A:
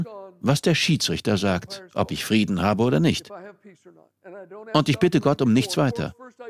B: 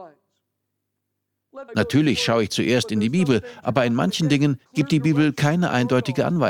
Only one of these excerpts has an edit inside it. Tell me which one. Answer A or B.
B